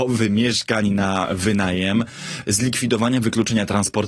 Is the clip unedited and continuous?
yes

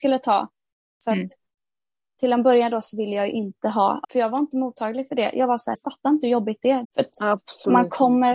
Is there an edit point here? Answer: yes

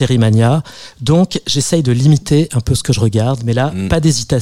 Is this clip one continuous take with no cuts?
no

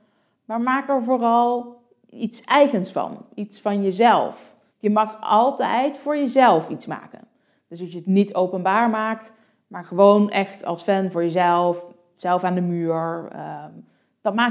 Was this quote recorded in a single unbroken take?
no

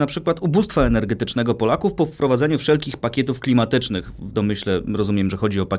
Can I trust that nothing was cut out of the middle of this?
yes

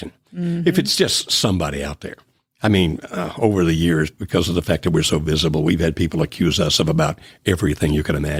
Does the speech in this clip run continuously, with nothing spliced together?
yes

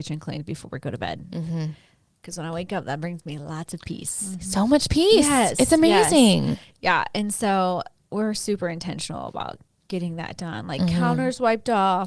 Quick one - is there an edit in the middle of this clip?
no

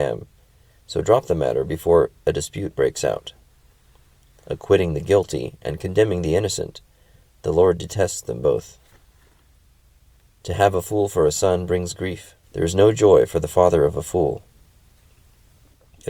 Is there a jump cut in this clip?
yes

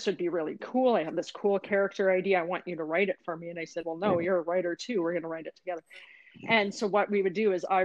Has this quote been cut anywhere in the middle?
no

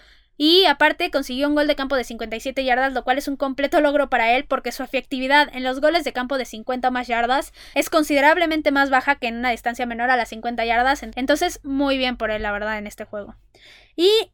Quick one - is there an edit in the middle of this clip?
no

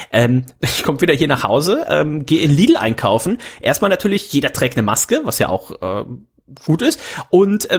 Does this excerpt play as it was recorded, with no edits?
yes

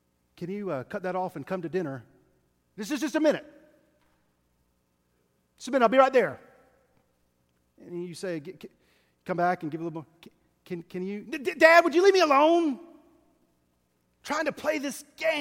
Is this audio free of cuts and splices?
yes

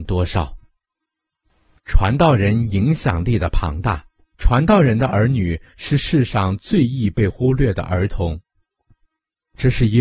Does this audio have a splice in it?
yes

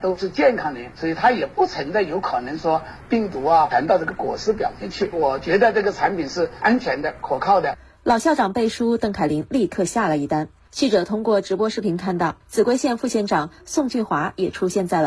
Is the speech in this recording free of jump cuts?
no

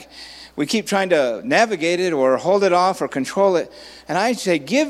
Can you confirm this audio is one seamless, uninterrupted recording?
yes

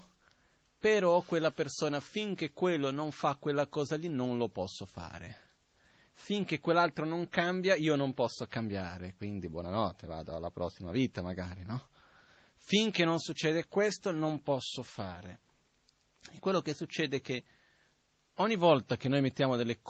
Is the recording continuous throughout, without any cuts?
yes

